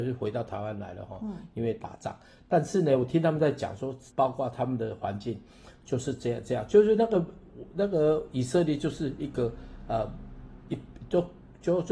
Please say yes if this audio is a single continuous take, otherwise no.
no